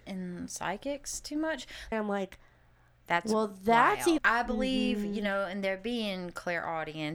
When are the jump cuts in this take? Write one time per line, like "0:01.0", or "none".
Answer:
0:01.9
0:04.2

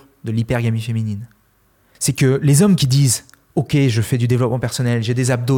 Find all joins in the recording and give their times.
0:01.9

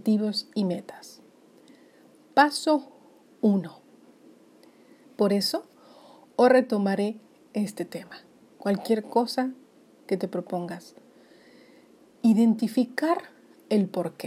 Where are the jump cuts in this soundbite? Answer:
0:05.0
0:08.6
0:12.2

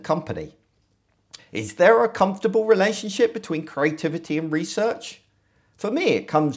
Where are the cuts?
0:01.4

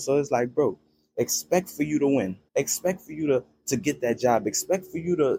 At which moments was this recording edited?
0:02.5

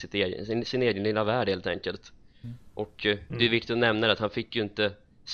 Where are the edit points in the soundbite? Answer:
none

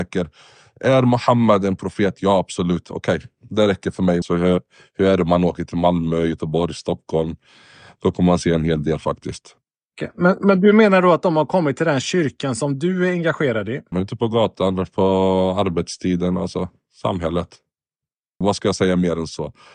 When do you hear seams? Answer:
0:04.2
0:13.9
0:18.4

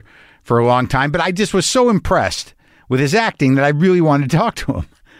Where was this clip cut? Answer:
none

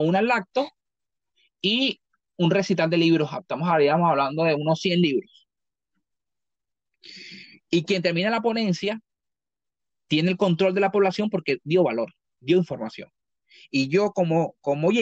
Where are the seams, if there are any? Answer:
none

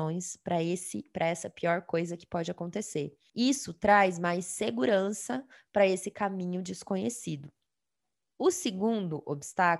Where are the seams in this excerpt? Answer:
none

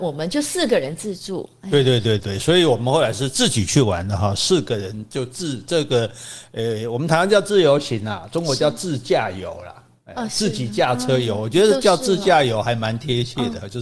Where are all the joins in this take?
0:02.2

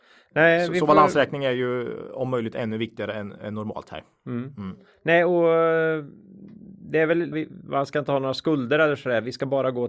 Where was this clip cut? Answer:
0:07.3

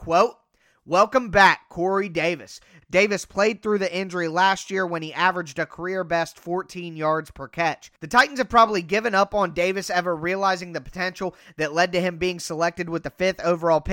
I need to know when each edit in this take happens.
0:02.8

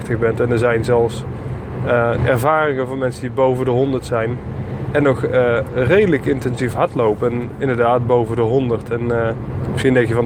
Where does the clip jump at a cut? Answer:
0:02.2

